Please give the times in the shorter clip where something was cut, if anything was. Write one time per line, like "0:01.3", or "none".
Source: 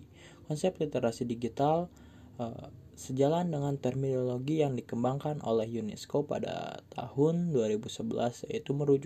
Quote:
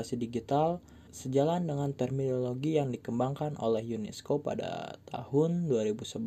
0:01.1